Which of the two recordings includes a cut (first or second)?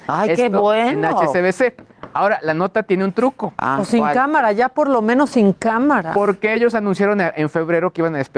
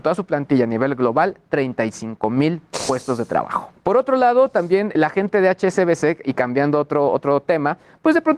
second